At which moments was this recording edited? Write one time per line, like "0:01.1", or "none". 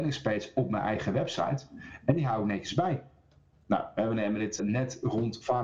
0:03.5
0:04.6